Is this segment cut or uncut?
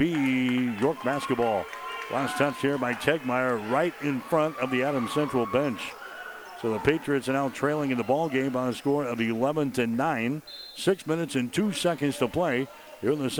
uncut